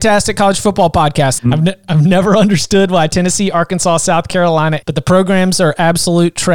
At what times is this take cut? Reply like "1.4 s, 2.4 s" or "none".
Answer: 1.4 s, 4.8 s